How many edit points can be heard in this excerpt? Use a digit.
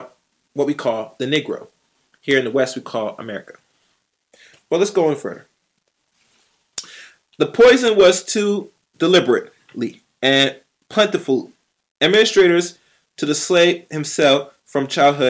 0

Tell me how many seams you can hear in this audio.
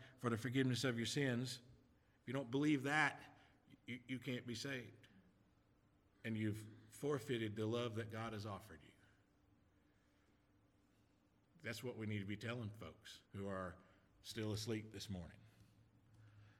2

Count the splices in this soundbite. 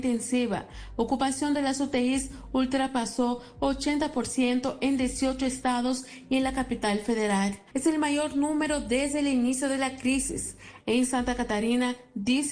2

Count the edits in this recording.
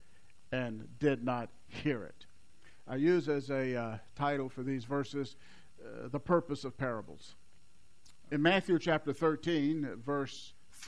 1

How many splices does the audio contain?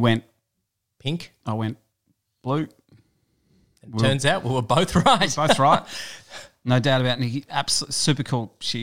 0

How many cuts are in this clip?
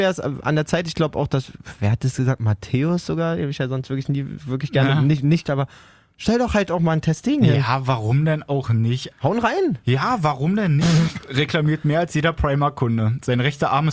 3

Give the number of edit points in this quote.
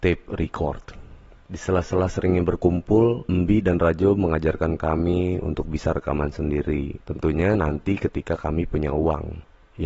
1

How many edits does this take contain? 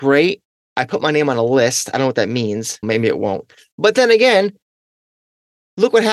1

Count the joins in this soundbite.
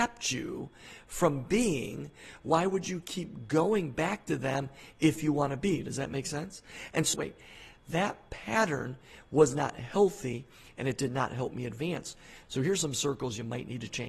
2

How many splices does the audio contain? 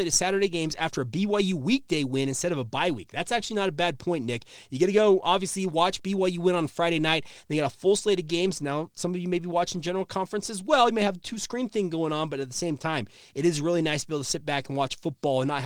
0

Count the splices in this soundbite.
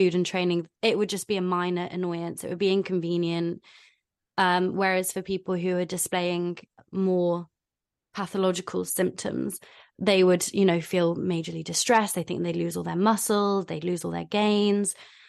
0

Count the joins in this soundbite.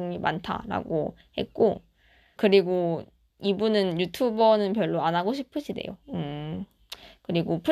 2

